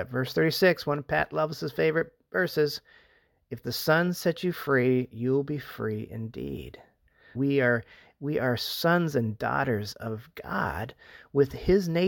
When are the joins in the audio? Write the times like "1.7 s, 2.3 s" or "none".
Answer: 7.3 s